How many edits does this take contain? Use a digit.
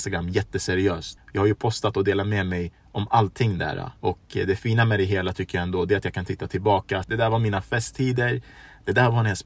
3